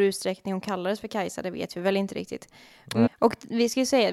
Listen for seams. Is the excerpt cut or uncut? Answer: cut